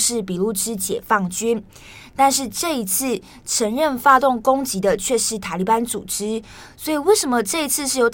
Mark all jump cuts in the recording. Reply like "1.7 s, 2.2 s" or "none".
none